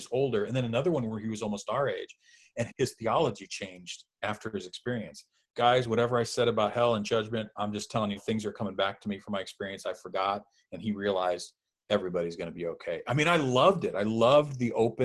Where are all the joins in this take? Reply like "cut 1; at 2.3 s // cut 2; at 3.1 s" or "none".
cut 1; at 2.7 s // cut 2; at 8.2 s